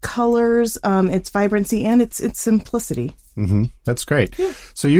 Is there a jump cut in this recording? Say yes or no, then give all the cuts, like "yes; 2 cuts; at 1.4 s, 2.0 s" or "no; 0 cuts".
no; 0 cuts